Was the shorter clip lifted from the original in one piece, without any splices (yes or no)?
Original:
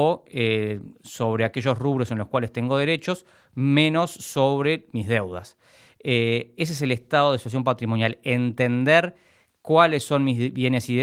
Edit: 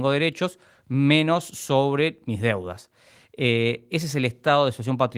yes